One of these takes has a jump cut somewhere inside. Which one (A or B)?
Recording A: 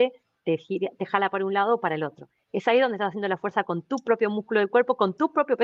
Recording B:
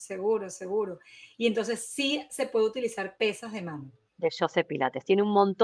B